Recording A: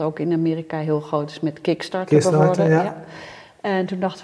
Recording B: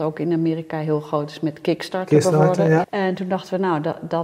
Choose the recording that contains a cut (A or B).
B